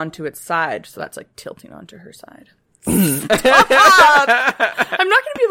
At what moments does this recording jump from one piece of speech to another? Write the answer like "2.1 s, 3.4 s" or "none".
2.8 s